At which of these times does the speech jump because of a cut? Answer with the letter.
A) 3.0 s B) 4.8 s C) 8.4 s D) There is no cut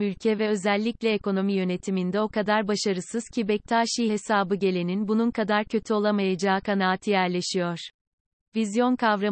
C